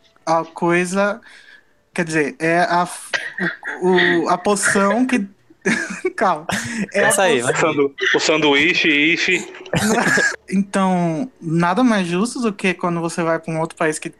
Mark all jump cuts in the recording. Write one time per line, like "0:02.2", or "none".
0:10.3